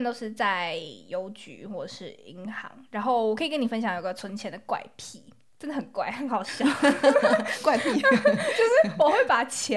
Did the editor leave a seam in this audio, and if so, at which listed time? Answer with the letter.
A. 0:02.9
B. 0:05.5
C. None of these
B